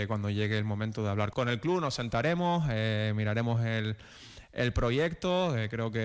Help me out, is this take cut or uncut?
cut